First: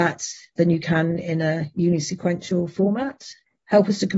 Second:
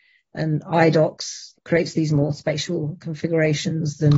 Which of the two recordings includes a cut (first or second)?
second